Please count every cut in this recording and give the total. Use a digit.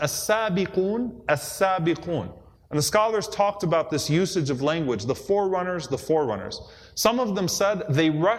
1